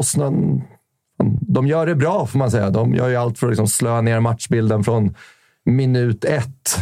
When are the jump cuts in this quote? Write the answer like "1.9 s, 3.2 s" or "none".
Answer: none